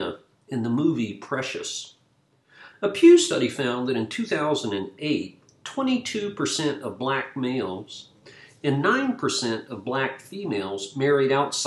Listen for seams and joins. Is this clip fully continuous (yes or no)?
no